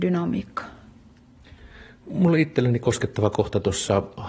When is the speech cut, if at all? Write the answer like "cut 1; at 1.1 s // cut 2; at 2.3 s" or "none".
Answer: none